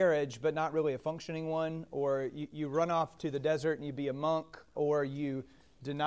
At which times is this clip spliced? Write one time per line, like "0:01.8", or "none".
0:04.7